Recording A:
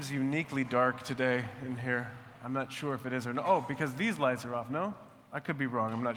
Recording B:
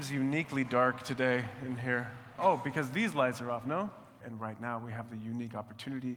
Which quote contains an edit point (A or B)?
B